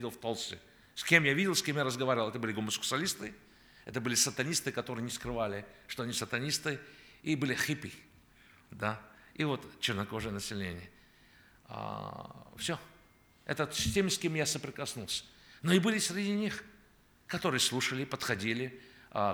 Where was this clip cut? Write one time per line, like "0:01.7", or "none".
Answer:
none